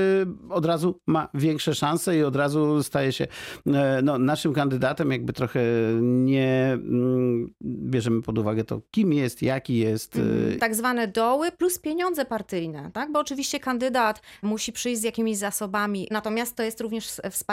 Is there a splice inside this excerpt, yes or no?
yes